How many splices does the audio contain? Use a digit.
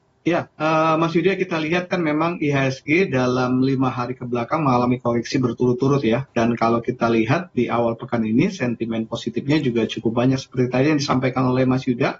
1